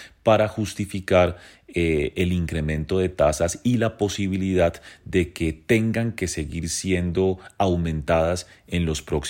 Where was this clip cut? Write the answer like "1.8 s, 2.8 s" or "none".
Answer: none

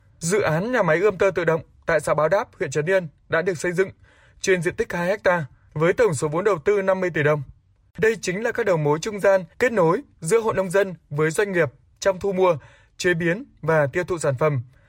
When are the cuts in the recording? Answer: 7.9 s, 9.5 s

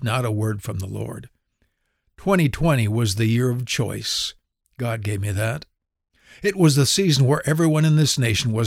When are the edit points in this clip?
none

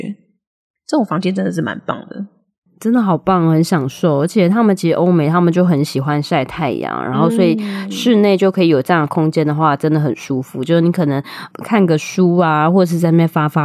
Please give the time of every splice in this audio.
none

